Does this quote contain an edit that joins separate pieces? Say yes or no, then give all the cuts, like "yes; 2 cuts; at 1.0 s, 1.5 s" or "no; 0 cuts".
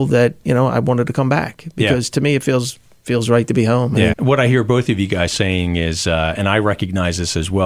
yes; 1 cut; at 4.1 s